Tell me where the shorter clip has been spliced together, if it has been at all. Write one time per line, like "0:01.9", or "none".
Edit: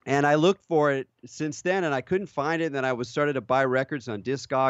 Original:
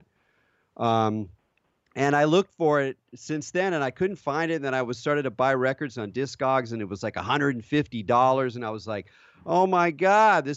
none